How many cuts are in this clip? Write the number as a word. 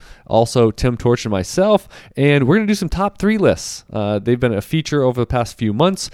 zero